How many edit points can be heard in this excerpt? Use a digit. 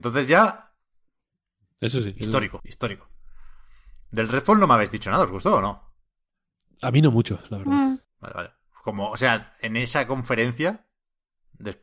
2